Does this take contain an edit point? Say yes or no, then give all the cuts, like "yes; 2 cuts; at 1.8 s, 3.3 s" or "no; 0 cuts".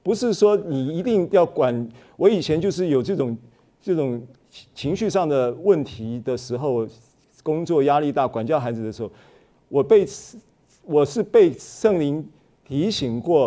no; 0 cuts